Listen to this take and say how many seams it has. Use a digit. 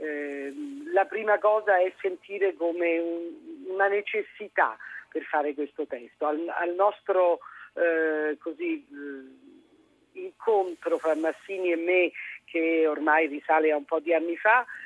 0